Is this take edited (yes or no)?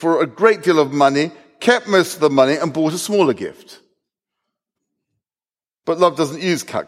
no